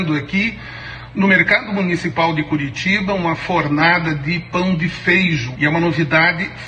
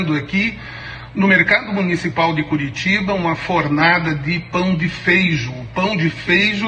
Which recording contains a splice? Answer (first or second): first